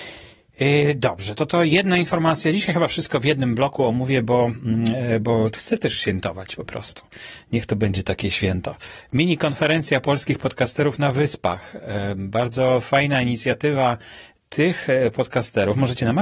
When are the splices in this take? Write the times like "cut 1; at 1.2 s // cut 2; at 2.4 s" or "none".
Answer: none